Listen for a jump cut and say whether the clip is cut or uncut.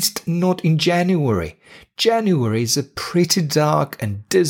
uncut